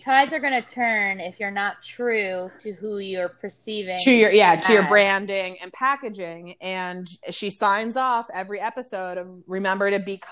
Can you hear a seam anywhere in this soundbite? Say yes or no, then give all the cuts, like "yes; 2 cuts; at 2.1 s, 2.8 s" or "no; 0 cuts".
no; 0 cuts